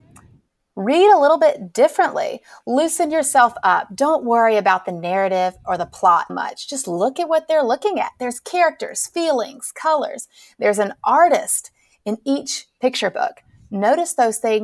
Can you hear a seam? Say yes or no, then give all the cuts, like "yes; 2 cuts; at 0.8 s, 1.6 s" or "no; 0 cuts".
yes; 1 cut; at 6.3 s